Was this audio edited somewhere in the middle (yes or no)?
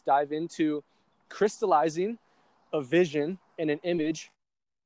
yes